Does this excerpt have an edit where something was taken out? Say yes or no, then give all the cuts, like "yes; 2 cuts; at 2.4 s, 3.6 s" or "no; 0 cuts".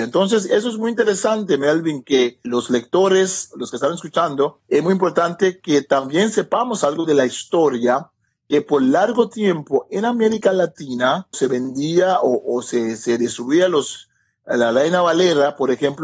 no; 0 cuts